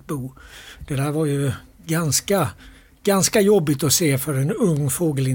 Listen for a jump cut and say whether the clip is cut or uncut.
uncut